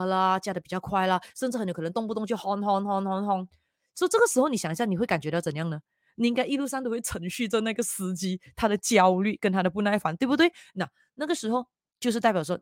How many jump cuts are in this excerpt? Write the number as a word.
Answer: zero